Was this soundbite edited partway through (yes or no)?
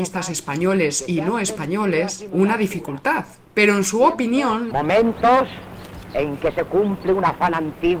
yes